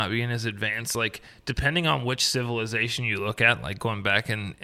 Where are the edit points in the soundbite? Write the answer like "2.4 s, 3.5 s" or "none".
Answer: none